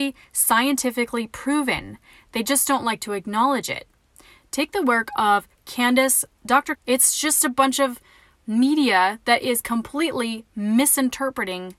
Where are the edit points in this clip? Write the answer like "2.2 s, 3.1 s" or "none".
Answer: 6.8 s